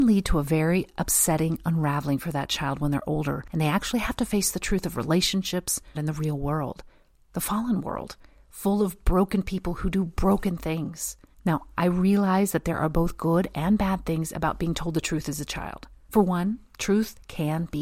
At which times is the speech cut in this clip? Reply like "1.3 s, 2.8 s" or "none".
5.9 s